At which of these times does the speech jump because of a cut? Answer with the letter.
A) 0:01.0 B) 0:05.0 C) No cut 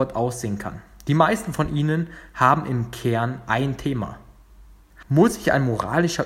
B